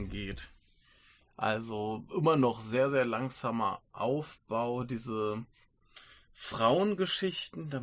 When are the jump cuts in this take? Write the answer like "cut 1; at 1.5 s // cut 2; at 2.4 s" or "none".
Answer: none